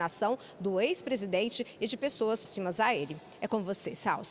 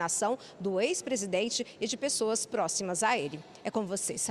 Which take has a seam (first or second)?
first